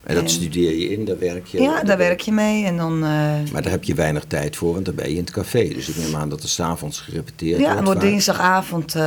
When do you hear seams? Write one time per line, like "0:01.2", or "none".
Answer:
none